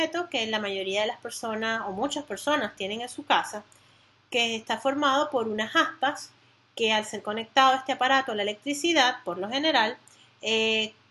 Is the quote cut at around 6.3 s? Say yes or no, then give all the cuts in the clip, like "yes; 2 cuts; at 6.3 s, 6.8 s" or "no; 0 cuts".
no; 0 cuts